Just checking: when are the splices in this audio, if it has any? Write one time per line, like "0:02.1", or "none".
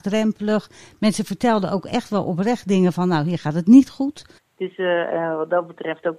0:04.4